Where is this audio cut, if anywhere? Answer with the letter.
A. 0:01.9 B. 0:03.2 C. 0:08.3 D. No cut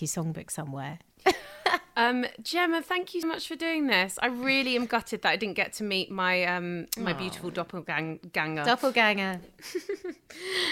B